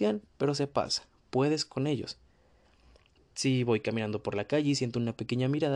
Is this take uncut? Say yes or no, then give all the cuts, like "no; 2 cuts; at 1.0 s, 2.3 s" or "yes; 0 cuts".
no; 1 cut; at 3.2 s